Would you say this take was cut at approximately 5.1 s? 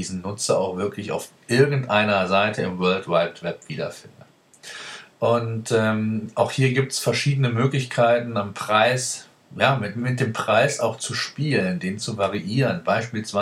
yes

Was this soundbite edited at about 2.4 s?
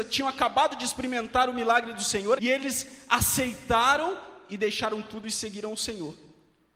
yes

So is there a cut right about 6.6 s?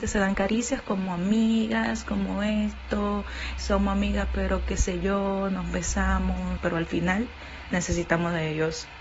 yes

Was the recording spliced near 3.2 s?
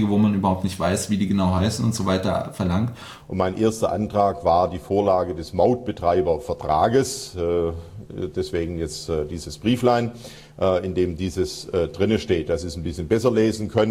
yes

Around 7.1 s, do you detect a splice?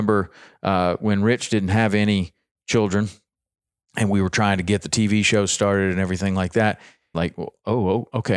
yes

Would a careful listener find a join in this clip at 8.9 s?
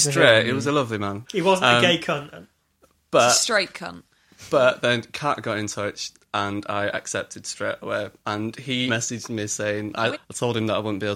yes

